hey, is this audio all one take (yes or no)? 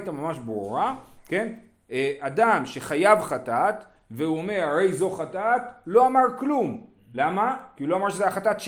yes